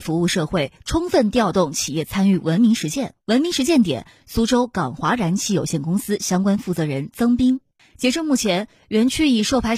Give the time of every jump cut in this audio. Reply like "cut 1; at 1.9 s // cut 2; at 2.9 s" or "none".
cut 1; at 3.2 s // cut 2; at 7.8 s